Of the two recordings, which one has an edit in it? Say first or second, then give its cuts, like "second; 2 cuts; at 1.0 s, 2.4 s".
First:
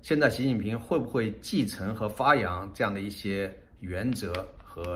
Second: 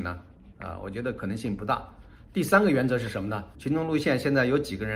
second; 1 cut; at 3.5 s